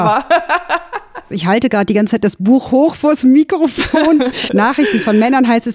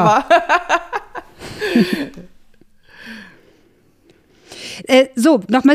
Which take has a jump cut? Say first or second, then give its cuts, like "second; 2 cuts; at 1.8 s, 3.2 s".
first; 2 cuts; at 1.3 s, 4.5 s